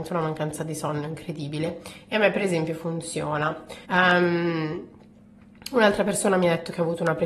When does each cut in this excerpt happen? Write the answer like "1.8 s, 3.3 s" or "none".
3.8 s